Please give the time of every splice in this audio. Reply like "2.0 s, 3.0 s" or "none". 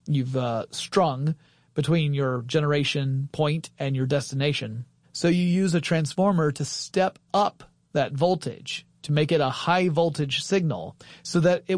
5.0 s